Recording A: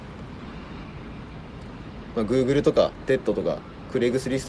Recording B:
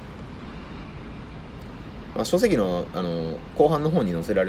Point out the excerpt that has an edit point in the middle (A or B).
A